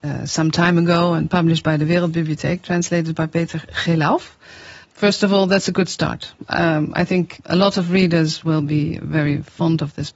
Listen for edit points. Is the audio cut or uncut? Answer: cut